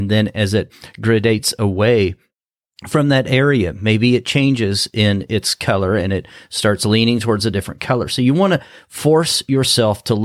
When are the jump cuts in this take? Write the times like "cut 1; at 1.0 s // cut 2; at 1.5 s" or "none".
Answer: none

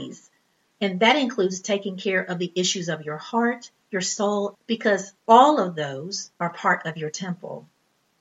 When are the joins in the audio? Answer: cut 1; at 4.5 s

